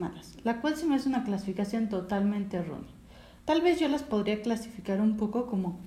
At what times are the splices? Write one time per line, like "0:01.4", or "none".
0:03.4